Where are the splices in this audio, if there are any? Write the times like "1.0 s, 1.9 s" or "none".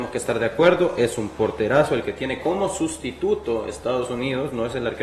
none